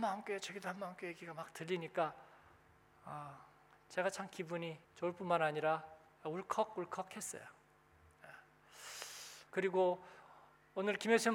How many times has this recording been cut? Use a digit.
2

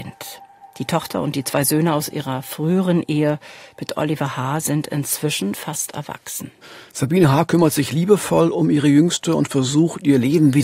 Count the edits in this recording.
1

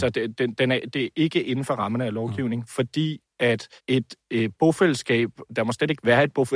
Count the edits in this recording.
2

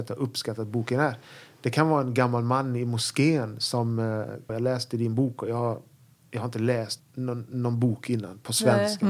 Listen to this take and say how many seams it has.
2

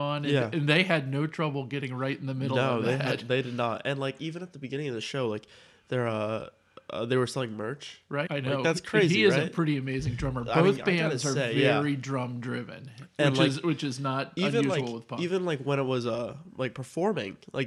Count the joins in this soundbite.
1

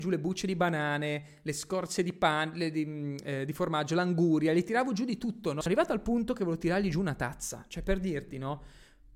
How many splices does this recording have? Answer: 1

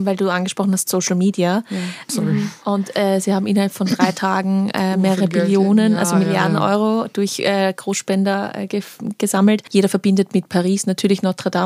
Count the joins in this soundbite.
2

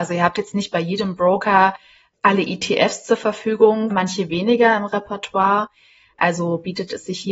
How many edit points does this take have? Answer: 1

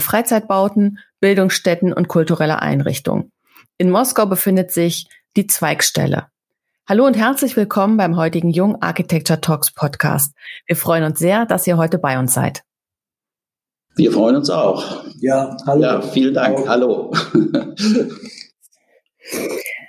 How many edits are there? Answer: 0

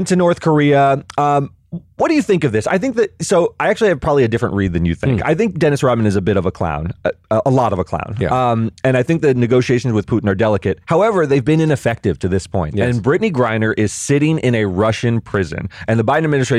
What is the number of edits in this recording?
0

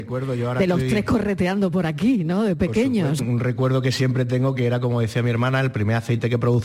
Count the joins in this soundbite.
1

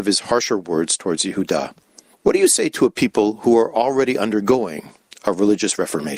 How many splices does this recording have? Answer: 1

